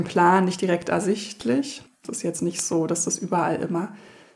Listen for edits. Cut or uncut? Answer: cut